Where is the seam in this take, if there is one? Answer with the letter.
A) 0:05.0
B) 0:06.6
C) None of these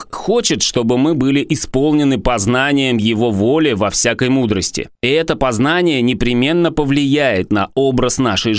A